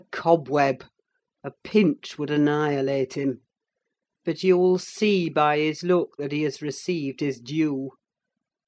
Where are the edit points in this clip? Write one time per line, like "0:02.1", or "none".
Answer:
none

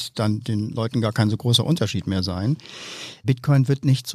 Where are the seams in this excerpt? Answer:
0:03.2

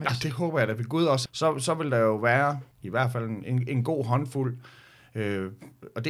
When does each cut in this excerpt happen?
0:01.3
0:02.7

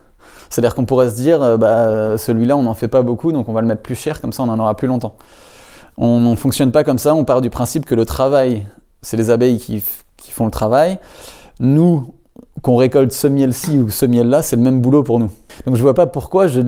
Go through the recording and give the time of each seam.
none

